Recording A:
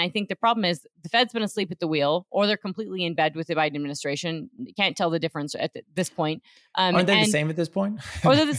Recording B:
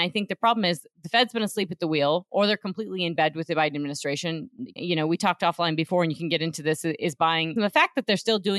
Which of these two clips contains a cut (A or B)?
B